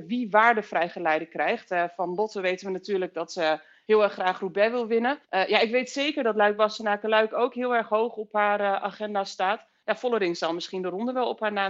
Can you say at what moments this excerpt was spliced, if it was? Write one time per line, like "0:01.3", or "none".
0:05.2